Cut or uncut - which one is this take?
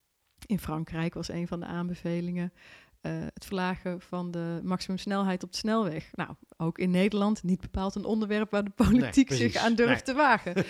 uncut